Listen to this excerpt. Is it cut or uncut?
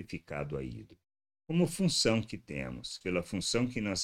cut